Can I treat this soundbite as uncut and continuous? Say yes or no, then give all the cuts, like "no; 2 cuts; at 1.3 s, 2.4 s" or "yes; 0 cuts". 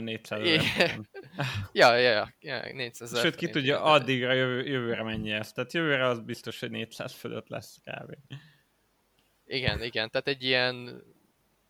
yes; 0 cuts